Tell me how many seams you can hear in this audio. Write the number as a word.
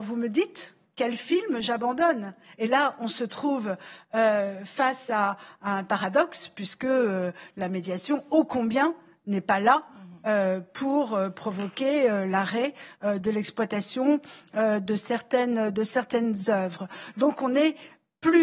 zero